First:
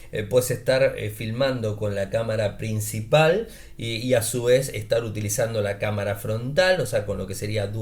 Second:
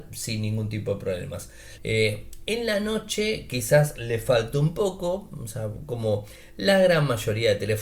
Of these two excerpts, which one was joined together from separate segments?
second; 1 cut; at 1.8 s

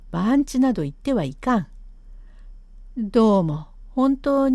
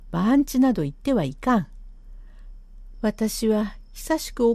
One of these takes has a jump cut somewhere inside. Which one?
second; 1 cut; at 2.9 s

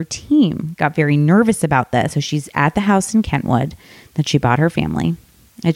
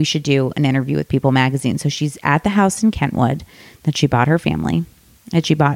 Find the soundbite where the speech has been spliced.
first; 1 cut; at 2.1 s

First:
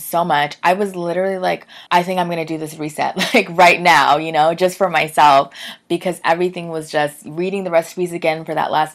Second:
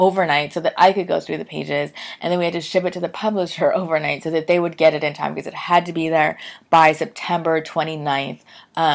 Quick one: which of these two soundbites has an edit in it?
first; 1 cut; at 1.9 s

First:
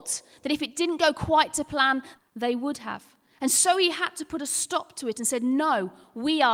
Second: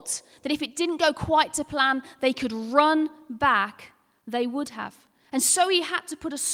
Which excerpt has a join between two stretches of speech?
first; 1 cut; at 2.2 s

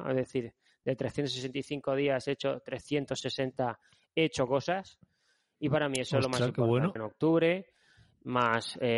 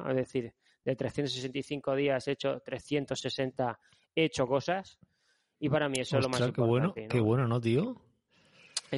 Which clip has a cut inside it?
first; 1 cut; at 7.0 s

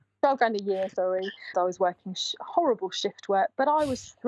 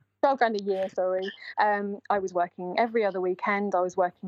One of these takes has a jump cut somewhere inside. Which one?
first; 1 cut; at 1.5 s

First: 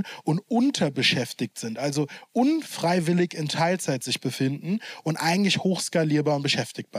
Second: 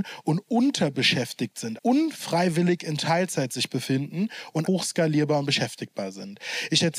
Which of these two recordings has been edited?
second; 2 cuts; at 1.8 s, 4.6 s

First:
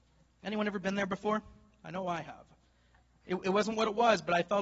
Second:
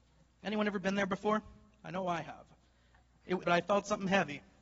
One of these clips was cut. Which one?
second; 1 cut; at 3.4 s

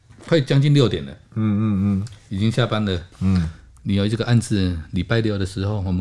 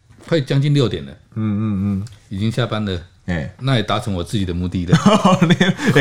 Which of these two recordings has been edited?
first; 1 cut; at 3.1 s

